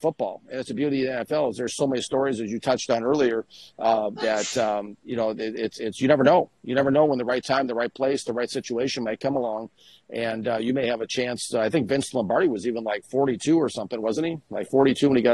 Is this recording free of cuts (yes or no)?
yes